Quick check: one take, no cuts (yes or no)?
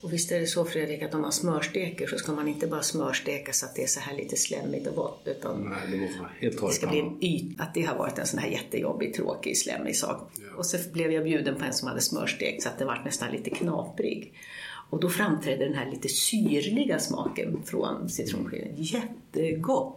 no